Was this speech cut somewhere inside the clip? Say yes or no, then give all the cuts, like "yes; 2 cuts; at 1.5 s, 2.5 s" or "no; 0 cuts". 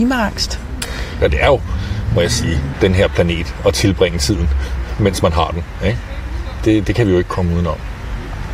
yes; 2 cuts; at 1.2 s, 2.7 s